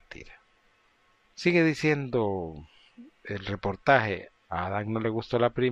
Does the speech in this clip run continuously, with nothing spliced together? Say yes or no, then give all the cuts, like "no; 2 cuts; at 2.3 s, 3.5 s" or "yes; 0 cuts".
no; 2 cuts; at 1.2 s, 4.4 s